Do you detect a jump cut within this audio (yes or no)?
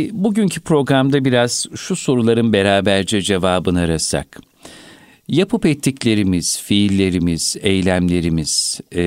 no